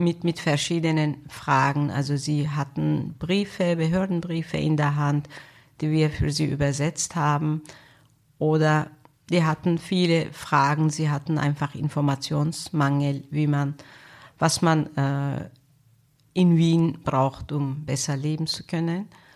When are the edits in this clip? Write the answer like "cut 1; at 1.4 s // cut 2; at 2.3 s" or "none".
none